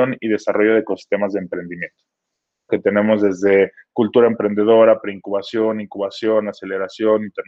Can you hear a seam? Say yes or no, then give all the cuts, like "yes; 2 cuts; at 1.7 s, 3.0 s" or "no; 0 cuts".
yes; 1 cut; at 2.7 s